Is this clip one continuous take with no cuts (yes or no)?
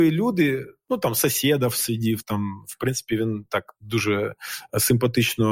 yes